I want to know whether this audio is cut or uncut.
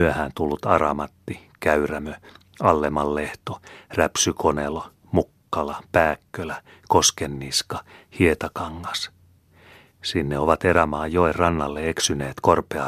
uncut